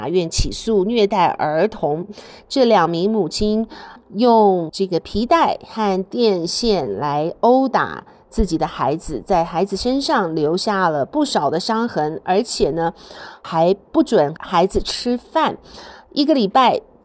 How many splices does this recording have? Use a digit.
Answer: 1